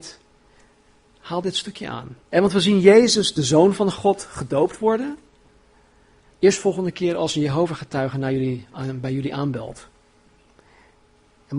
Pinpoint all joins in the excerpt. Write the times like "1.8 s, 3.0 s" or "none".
2.2 s, 6.3 s